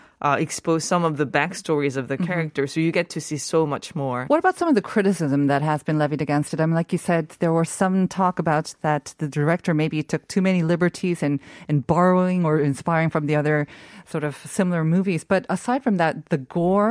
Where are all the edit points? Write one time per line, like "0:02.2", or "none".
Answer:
0:04.3